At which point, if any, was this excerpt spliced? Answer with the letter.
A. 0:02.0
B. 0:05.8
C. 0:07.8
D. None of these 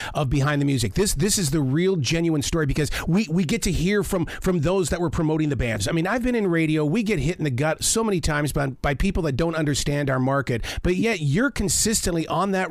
B